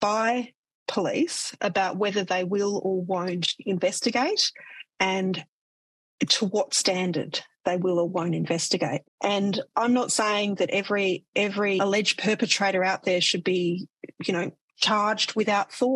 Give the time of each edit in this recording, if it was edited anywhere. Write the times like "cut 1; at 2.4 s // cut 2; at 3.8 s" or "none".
cut 1; at 9.0 s